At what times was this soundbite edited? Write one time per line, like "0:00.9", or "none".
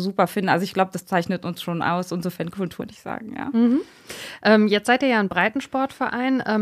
0:02.8